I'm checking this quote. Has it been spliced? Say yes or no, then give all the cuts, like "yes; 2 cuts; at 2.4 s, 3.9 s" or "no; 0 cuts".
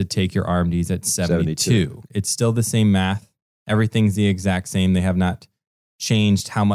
yes; 1 cut; at 2.1 s